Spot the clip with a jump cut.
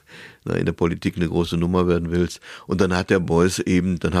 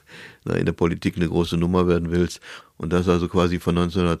second; 1 cut; at 2.6 s

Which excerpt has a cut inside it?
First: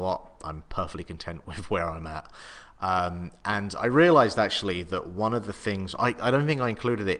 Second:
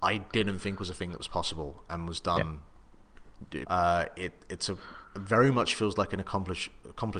second; 2 cuts; at 1.9 s, 3.6 s

